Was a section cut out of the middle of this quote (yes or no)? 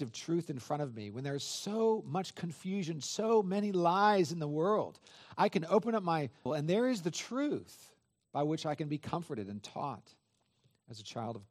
yes